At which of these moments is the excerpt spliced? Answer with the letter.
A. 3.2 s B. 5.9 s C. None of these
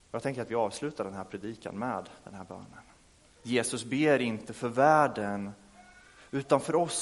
A